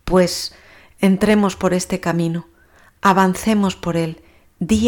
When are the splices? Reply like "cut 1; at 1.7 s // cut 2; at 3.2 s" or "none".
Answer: none